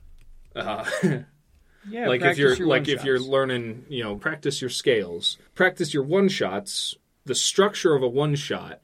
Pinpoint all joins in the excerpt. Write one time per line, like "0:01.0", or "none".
0:04.2
0:05.5